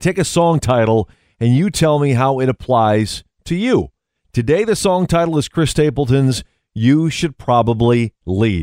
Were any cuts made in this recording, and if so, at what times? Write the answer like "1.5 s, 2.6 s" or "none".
none

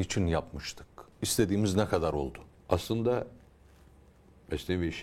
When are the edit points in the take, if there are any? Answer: 1.1 s, 2.5 s

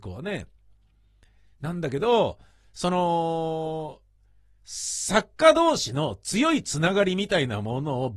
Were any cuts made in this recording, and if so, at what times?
none

